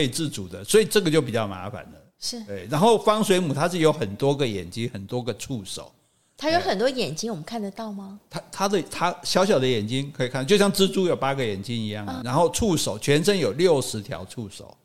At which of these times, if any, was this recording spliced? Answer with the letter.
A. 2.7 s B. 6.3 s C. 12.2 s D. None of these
C